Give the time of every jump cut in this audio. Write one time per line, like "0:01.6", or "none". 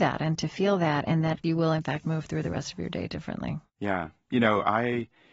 none